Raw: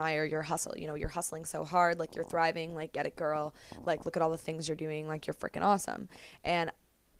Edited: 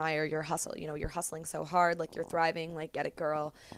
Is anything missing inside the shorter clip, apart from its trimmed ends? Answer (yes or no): no